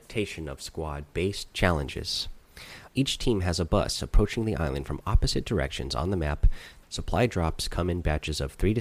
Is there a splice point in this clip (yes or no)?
yes